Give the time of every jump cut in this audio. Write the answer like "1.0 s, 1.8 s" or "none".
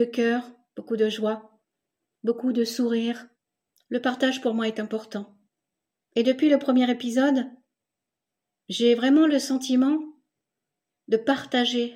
3.7 s, 6.0 s